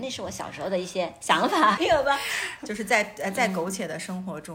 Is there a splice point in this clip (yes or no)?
yes